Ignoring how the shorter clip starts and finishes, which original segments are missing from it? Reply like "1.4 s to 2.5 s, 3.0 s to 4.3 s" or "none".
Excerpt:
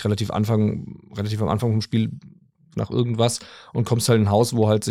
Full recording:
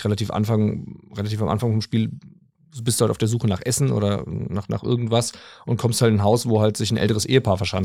2.7 s to 4.7 s